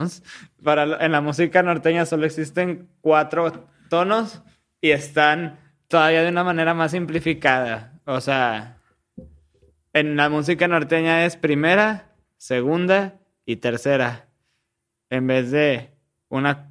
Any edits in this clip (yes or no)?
yes